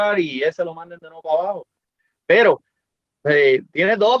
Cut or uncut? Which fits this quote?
uncut